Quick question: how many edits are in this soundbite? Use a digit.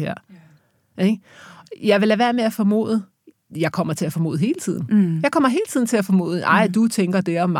1